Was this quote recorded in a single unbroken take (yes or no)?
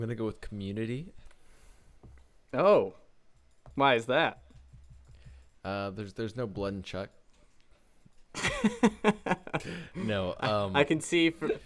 yes